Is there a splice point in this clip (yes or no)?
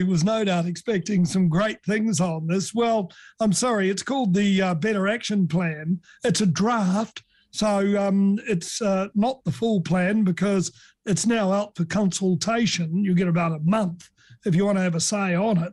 no